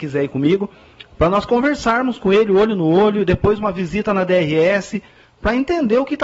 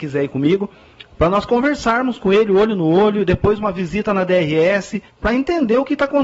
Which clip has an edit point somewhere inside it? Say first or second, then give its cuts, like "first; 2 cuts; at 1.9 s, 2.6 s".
second; 1 cut; at 5.1 s